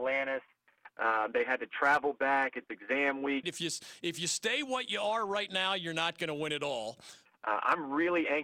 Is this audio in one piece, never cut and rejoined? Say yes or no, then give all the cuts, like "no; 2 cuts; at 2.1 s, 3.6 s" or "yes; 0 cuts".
no; 2 cuts; at 3.4 s, 7.3 s